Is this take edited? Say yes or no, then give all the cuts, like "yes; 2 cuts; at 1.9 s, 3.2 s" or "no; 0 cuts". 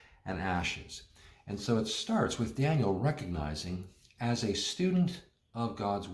no; 0 cuts